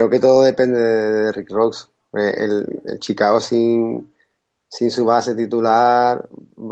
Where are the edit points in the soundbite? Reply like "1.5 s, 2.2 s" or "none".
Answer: none